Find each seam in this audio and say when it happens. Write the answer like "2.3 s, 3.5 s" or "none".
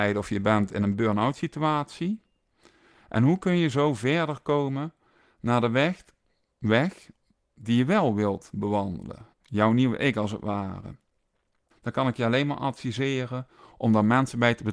9.3 s, 11.7 s